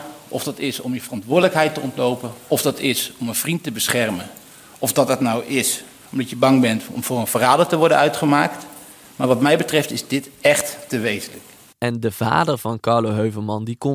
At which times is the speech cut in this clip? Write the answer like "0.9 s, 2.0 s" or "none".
11.7 s